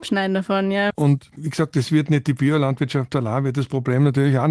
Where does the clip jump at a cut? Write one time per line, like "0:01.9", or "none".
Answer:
0:00.9